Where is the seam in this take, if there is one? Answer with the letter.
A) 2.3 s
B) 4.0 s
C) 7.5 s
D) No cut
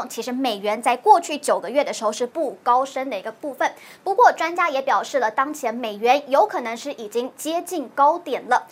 A